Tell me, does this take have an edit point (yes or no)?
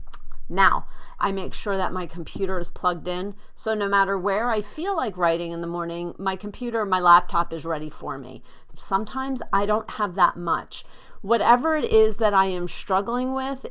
yes